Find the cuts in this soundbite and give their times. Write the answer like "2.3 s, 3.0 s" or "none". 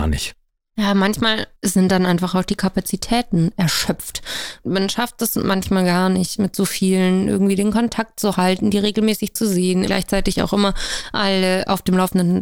9.9 s